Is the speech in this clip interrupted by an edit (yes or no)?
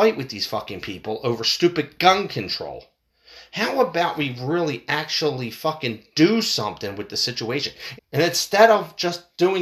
yes